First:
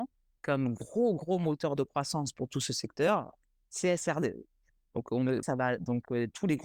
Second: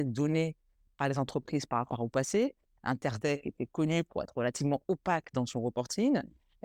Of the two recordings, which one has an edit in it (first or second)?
first